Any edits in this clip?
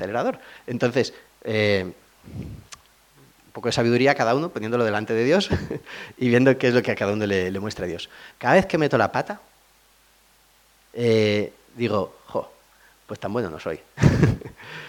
yes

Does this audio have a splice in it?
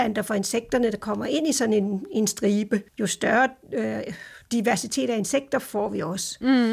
yes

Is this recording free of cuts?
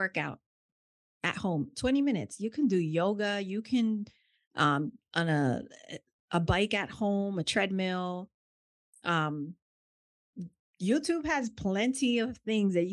yes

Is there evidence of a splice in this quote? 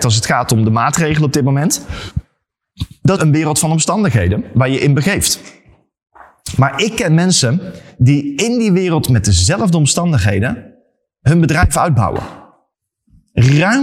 yes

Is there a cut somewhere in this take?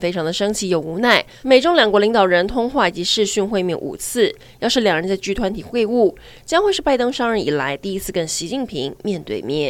yes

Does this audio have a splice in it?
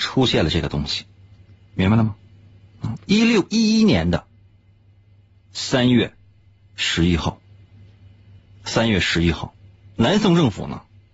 no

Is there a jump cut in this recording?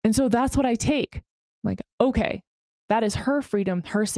no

